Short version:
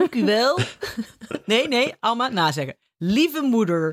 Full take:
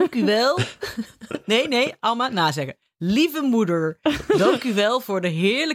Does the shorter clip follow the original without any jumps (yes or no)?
yes